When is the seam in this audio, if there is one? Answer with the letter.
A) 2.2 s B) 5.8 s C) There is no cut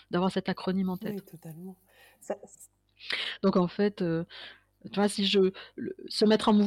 B